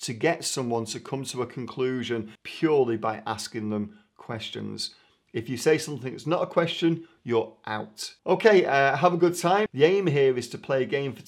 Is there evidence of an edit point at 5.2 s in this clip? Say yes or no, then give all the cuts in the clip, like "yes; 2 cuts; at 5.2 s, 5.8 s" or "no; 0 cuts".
no; 3 cuts; at 2.4 s, 8.2 s, 9.7 s